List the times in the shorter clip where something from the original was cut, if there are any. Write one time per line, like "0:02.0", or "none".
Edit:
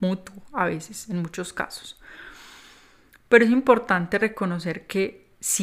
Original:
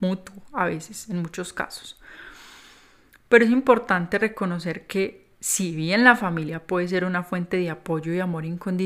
none